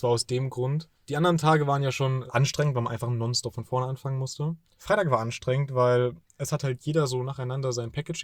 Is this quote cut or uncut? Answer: uncut